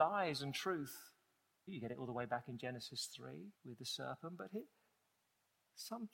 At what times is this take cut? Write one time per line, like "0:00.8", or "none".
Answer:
0:01.7
0:03.5